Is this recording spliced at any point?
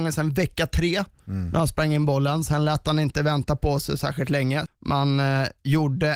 yes; 1 cut; at 4.7 s

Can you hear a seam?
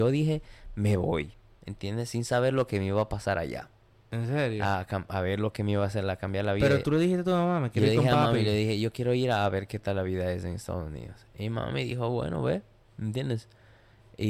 no; 0 cuts

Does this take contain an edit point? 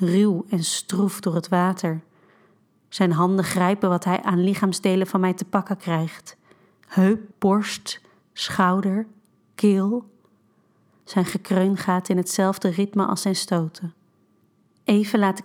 yes; 1 cut; at 7.3 s

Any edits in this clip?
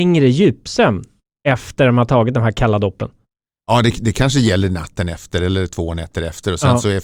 no; 0 cuts

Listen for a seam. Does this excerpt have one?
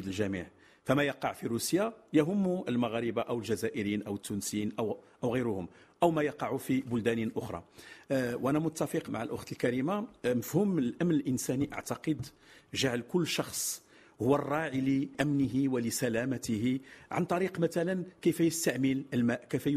yes; 1 cut; at 9.1 s

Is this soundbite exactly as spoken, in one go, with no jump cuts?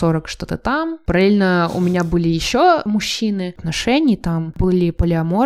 no; 1 cut; at 3.6 s

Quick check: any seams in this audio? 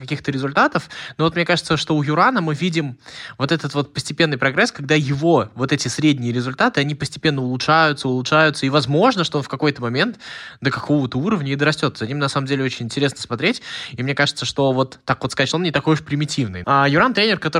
yes; 2 cuts; at 15.5 s, 16.6 s

